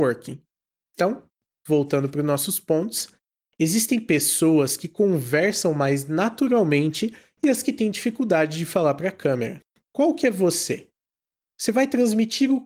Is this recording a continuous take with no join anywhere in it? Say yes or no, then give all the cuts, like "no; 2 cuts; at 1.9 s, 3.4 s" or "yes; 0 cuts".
yes; 0 cuts